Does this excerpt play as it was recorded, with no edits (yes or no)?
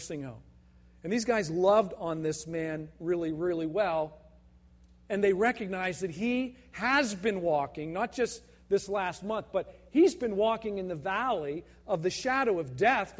yes